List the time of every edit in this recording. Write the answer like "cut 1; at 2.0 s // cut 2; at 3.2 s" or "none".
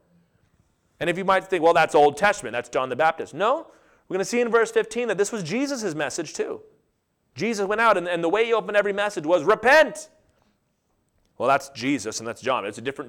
none